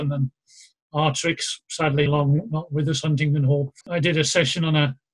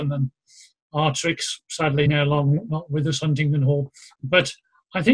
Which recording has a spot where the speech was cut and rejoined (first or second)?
first